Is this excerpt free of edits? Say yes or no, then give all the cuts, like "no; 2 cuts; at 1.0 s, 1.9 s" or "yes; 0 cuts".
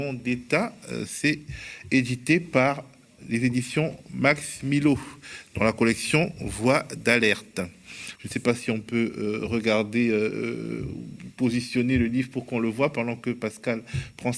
no; 1 cut; at 8.1 s